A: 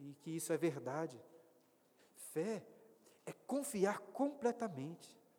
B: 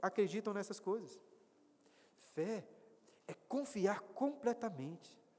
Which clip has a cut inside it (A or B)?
A